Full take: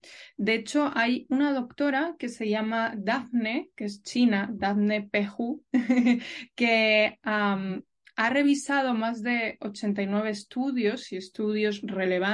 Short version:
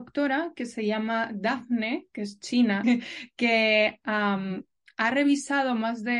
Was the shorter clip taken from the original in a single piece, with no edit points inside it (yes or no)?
no